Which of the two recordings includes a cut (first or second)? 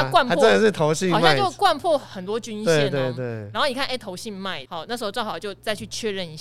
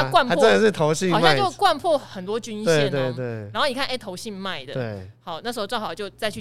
first